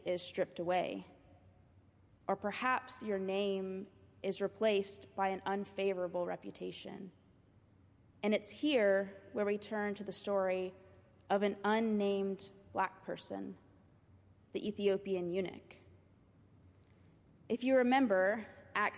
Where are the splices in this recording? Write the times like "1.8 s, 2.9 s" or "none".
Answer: none